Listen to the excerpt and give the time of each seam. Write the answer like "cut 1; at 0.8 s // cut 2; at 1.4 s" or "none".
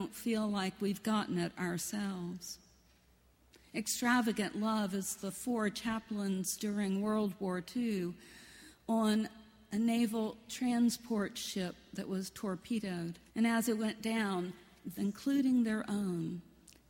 cut 1; at 13.3 s // cut 2; at 15.0 s